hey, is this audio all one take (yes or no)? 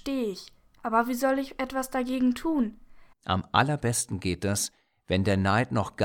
no